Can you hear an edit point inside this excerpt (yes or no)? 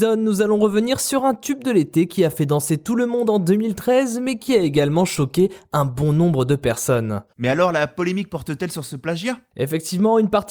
yes